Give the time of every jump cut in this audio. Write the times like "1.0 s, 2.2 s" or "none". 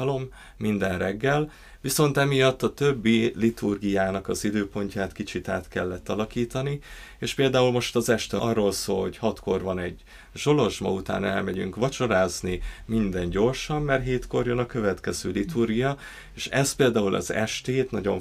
none